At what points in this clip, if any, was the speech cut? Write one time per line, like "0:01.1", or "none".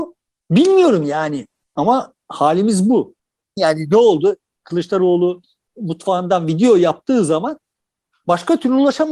0:03.6